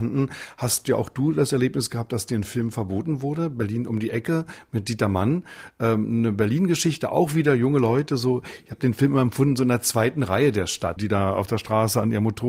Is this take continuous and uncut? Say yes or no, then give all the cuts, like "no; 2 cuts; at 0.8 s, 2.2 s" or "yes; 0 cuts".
no; 1 cut; at 11.0 s